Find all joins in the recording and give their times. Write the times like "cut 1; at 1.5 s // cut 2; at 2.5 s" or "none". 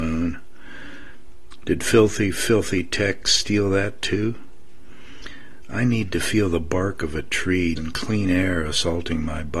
cut 1; at 1.6 s // cut 2; at 7.8 s